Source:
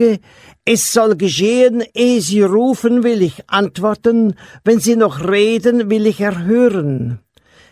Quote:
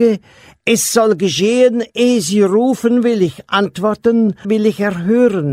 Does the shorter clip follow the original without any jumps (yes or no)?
no